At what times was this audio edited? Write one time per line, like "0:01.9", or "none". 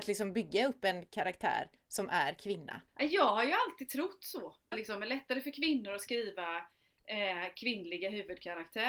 0:02.9
0:04.7